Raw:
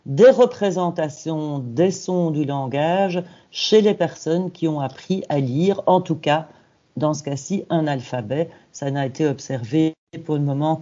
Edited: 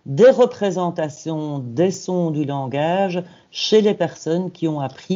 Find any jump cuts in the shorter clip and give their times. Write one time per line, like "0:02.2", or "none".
none